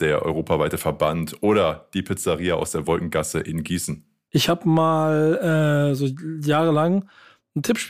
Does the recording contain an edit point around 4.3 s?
yes; 1 cut; at 4.3 s

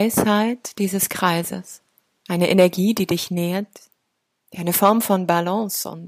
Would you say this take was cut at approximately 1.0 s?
no; 2 cuts; at 2.3 s, 4.3 s

